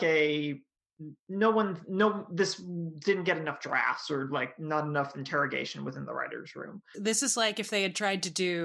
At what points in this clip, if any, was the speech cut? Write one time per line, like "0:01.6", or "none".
0:01.2
0:06.9